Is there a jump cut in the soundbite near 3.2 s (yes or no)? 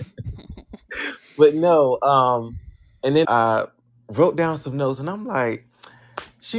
yes